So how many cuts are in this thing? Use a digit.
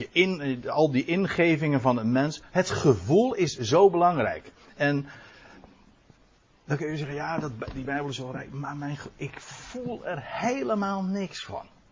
0